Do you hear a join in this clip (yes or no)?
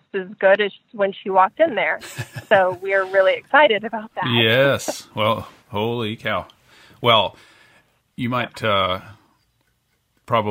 no